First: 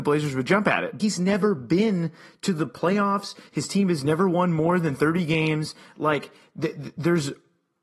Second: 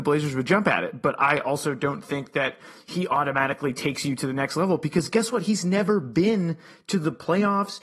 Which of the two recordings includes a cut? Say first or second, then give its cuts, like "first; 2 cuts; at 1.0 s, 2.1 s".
first; 1 cut; at 1.0 s